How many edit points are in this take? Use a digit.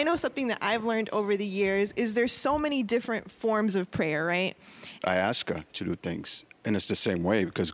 1